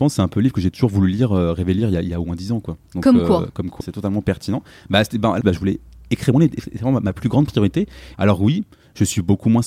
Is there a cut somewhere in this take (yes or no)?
yes